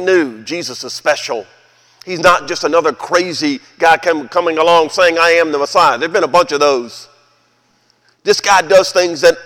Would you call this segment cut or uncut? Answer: uncut